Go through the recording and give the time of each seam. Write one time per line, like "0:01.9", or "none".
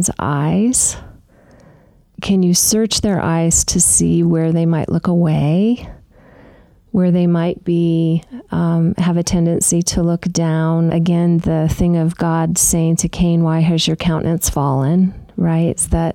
none